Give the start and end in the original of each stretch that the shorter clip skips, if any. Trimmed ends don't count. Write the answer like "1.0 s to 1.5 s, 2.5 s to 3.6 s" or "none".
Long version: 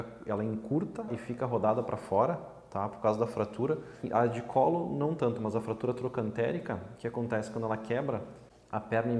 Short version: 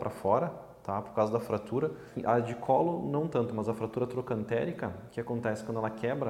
none